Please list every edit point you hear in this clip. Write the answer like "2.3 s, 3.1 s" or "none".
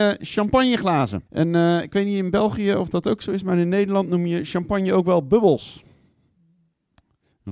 1.3 s